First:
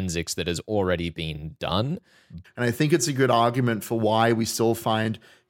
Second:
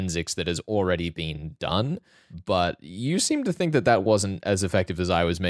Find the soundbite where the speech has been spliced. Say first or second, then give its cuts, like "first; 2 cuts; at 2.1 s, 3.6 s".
first; 1 cut; at 2.4 s